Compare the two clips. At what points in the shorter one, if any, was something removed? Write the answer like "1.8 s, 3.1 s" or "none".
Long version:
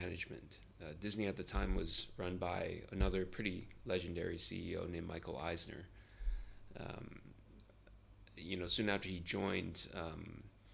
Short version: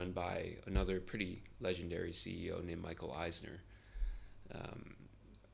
none